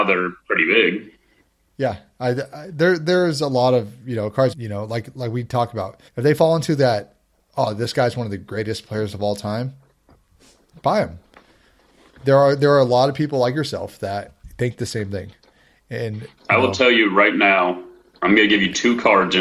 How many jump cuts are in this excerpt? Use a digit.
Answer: 2